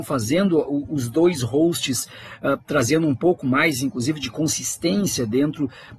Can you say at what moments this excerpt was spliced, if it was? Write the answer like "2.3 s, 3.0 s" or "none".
none